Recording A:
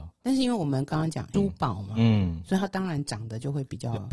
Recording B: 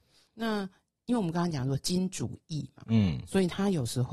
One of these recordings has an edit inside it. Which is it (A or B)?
A